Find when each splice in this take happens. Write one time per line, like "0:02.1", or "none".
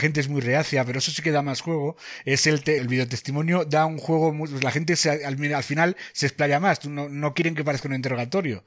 0:02.8